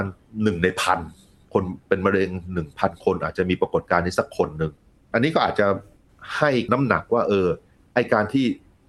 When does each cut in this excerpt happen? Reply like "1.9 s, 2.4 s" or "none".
none